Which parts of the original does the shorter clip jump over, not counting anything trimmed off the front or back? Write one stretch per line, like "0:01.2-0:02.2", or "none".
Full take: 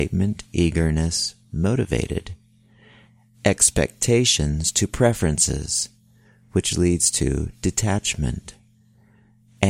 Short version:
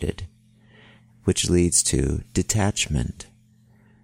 0:03.2-0:06.4